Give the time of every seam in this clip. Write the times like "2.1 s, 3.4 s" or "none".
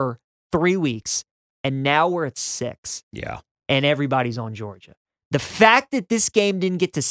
none